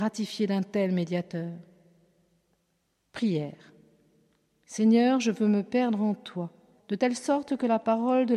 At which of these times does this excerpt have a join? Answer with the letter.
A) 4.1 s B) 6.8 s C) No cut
B